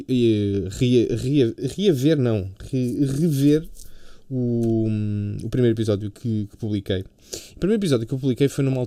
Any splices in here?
no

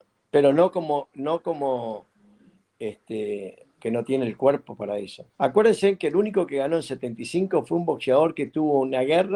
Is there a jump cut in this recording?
yes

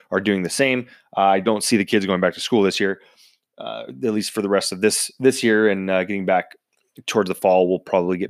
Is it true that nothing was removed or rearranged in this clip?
no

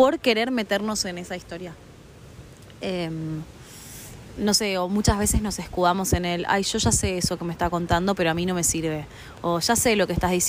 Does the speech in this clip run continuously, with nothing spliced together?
yes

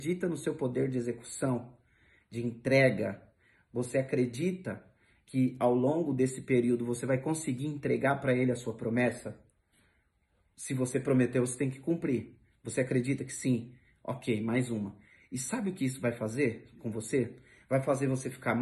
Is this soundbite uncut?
yes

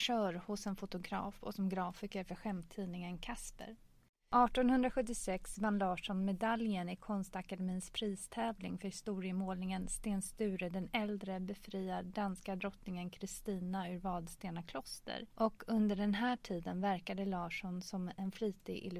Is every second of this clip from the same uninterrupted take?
yes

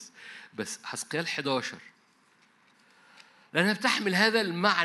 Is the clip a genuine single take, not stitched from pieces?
yes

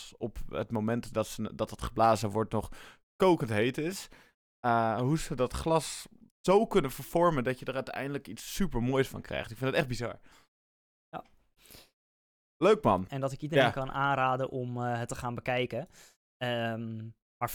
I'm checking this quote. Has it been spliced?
yes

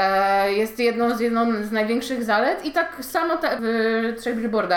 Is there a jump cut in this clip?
yes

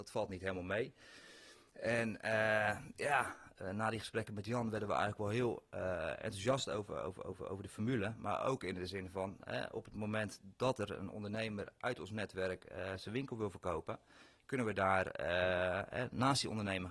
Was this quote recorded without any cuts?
yes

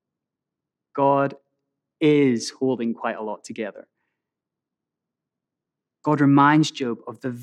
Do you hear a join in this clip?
no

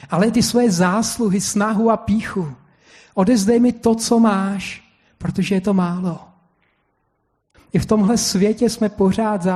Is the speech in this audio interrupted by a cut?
yes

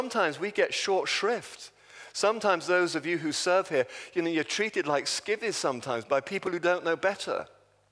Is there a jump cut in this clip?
no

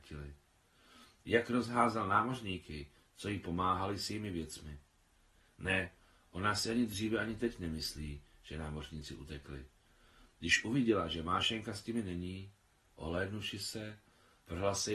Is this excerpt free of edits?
yes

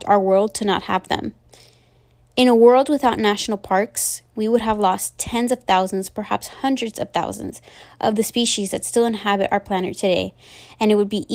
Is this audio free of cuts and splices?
yes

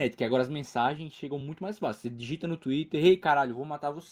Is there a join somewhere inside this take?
no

